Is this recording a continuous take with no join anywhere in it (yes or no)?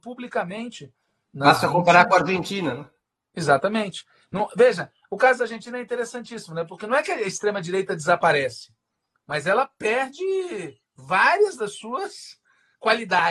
no